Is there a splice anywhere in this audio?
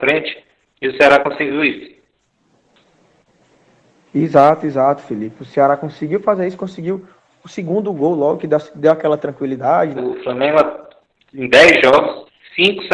yes; 1 cut; at 10.0 s

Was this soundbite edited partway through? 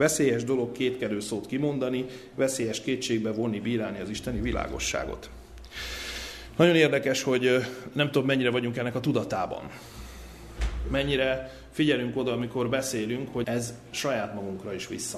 yes; 1 cut; at 13.4 s

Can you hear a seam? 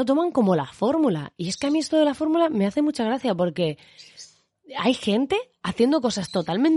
no; 0 cuts

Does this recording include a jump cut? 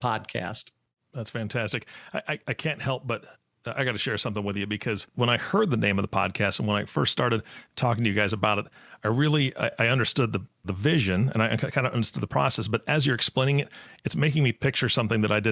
no; 0 cuts

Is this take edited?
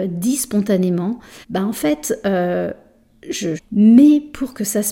yes; 2 cuts; at 1.4 s, 3.6 s

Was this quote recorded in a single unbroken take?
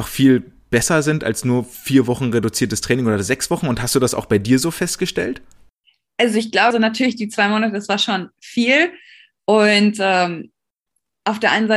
no; 1 cut; at 6.7 s

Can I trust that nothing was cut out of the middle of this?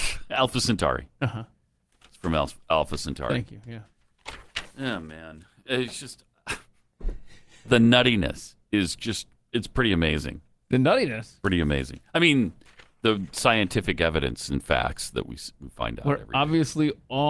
yes; 0 cuts

